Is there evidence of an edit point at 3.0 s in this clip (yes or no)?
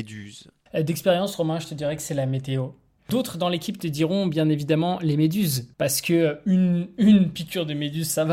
yes